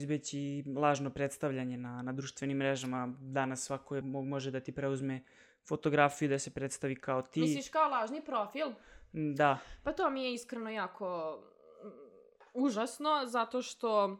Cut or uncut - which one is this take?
cut